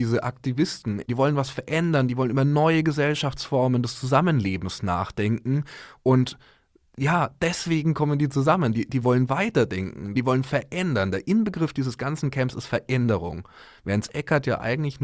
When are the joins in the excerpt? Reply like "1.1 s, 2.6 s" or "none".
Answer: 1.1 s, 10.1 s